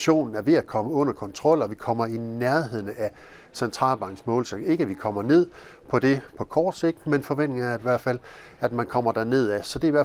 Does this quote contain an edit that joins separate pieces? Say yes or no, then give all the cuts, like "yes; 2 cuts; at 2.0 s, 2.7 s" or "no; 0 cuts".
no; 0 cuts